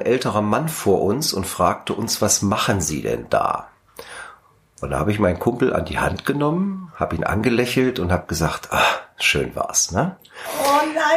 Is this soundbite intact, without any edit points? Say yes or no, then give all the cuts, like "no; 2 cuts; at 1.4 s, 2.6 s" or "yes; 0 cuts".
yes; 0 cuts